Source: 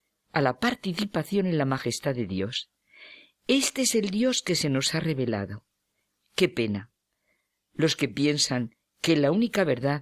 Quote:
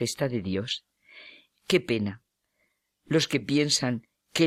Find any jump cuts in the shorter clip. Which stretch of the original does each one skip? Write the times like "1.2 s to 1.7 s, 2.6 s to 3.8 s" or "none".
3.3 s to 6.2 s